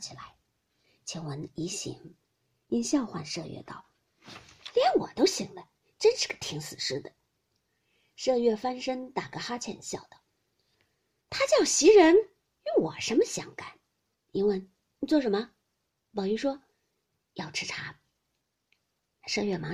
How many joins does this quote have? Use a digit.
1